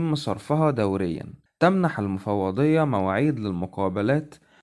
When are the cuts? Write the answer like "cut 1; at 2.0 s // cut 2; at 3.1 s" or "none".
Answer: cut 1; at 1.5 s